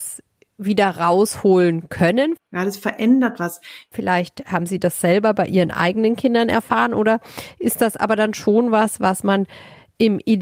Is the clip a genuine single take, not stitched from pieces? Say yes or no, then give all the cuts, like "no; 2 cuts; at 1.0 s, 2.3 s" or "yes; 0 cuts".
no; 2 cuts; at 2.4 s, 3.9 s